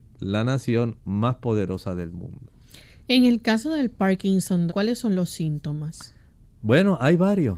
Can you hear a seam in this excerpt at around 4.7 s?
yes; 1 cut; at 4.7 s

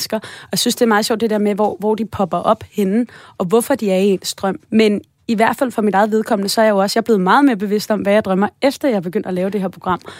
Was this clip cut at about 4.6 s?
yes; 1 cut; at 4.6 s

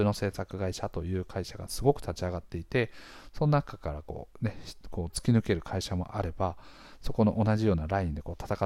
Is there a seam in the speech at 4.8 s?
no; 0 cuts

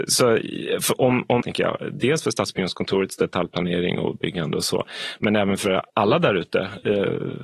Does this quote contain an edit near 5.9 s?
yes; 2 cuts; at 1.4 s, 5.9 s

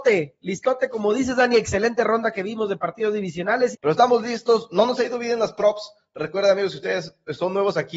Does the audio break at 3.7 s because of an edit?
yes; 1 cut; at 3.7 s

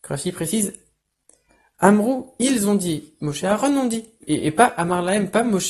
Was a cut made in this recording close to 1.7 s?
no; 1 cut; at 4.2 s

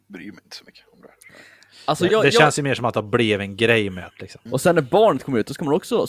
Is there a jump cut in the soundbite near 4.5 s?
yes; 2 cuts; at 2.1 s, 4.5 s

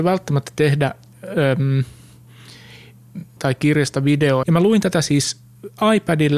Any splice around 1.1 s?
no; 2 cuts; at 3.4 s, 4.4 s

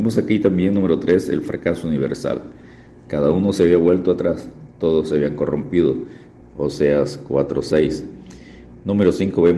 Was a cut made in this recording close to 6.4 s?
yes; 1 cut; at 6.4 s

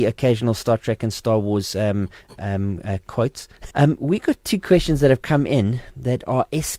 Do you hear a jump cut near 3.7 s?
yes; 2 cuts; at 2.4 s, 3.7 s

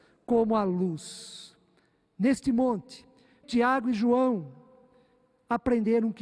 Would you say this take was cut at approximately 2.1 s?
no; 1 cut; at 3.4 s

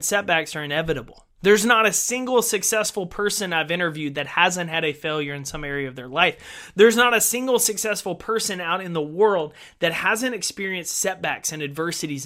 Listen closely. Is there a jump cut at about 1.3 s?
yes; 1 cut; at 1.3 s

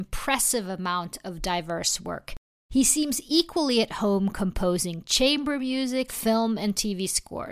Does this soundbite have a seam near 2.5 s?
no; 1 cut; at 6.1 s

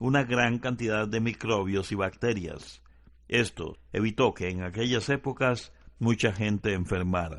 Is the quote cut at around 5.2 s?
no; 1 cut; at 3.8 s

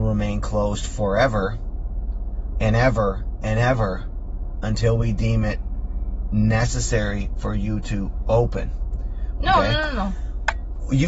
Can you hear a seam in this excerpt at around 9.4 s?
yes; 1 cut; at 9.4 s

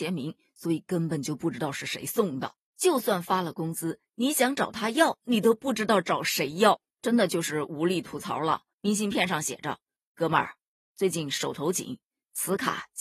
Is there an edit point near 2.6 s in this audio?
no; 1 cut; at 8.7 s

